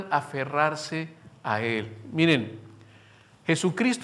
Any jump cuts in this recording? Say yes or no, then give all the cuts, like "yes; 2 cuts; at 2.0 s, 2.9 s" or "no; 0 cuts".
no; 0 cuts